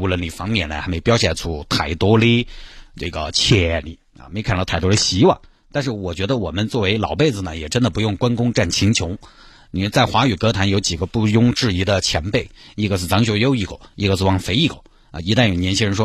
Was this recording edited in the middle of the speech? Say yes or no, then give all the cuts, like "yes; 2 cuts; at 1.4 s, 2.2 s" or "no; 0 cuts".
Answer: no; 0 cuts